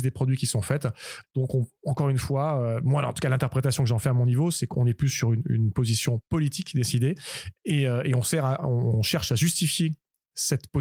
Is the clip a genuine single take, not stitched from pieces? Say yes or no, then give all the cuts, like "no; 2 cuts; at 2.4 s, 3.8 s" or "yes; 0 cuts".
no; 1 cut; at 1.2 s